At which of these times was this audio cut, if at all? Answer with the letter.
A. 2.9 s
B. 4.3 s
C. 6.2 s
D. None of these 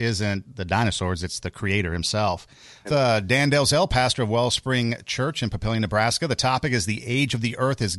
A